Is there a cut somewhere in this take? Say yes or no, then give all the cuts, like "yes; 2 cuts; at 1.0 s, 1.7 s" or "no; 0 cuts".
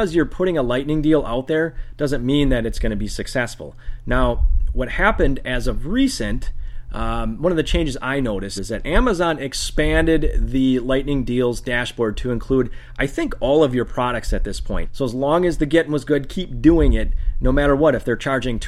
yes; 2 cuts; at 8.6 s, 14.8 s